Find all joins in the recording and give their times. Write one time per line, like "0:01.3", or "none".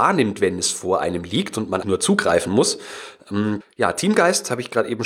0:01.8
0:03.6